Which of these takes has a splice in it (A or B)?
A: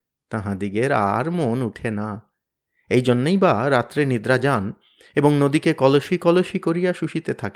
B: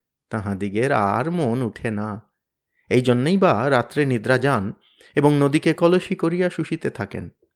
B